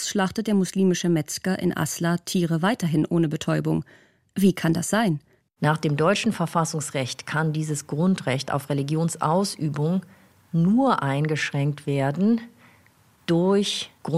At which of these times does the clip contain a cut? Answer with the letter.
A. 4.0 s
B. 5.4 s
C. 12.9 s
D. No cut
B